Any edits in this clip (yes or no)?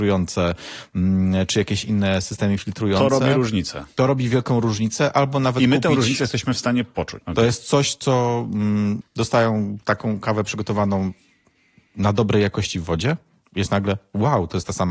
yes